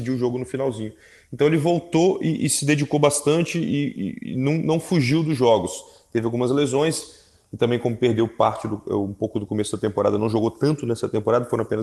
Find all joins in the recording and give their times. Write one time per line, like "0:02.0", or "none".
none